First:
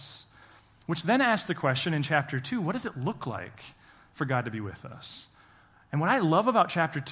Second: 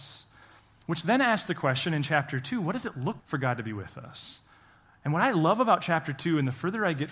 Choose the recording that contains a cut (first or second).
second